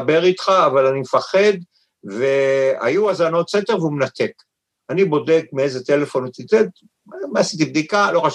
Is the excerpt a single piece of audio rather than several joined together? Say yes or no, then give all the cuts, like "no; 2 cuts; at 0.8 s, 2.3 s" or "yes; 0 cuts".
yes; 0 cuts